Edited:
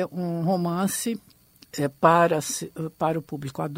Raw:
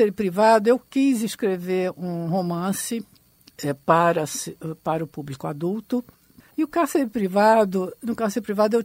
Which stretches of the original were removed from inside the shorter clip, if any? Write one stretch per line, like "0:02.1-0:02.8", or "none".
none

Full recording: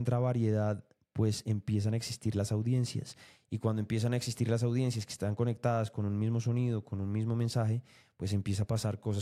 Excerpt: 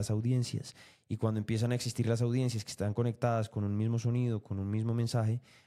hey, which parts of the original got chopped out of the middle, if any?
none

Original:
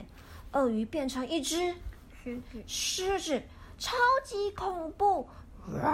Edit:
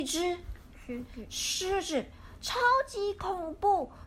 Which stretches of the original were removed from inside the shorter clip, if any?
none

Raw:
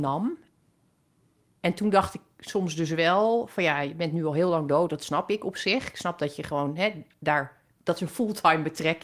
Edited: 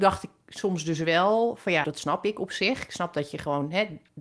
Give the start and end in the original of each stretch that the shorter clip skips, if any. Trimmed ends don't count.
0:03.7-0:04.9

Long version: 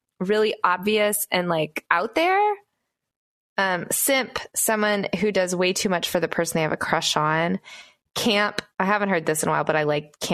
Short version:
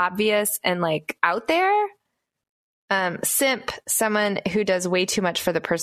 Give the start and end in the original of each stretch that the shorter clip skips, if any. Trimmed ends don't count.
none

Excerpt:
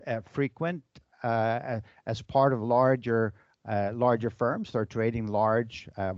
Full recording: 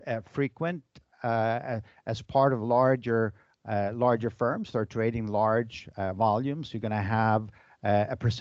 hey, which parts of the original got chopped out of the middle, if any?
none

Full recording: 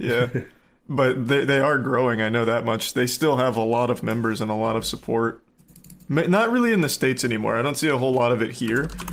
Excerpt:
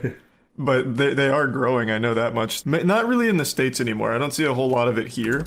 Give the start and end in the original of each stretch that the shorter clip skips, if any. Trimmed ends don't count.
0:02.9-0:06.1

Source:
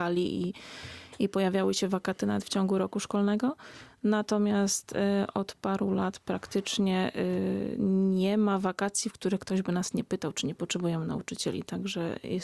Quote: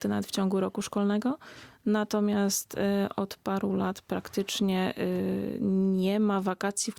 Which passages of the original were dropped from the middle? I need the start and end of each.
none

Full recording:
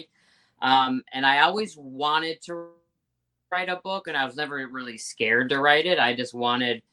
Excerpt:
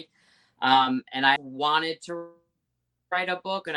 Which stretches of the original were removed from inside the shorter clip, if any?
0:01.4-0:01.8

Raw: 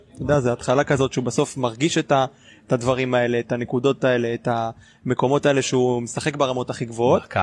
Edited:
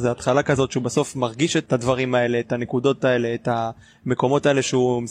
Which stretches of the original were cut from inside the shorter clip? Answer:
0:02.1-0:02.7

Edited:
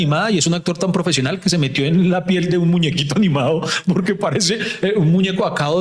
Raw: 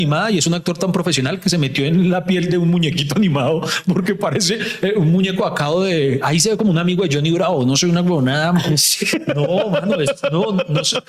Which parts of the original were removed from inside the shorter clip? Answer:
none

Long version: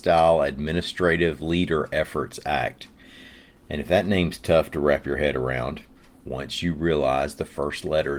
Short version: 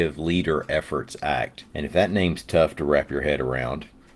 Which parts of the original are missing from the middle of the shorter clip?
0:02.9-0:03.6

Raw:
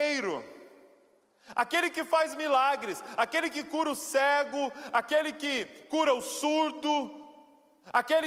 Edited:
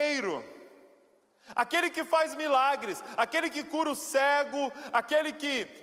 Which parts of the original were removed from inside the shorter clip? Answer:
none

